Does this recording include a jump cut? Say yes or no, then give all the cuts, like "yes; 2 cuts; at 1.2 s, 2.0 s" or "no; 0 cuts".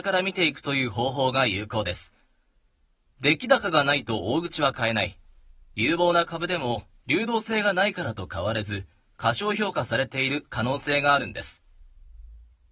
yes; 1 cut; at 7.0 s